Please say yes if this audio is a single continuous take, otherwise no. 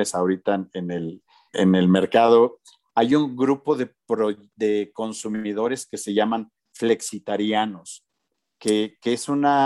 no